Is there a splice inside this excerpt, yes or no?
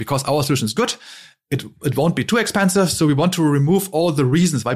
no